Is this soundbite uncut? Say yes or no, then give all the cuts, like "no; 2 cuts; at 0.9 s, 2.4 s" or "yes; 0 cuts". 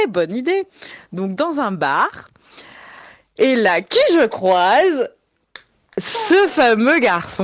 yes; 0 cuts